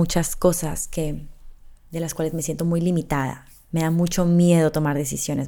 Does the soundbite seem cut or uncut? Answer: uncut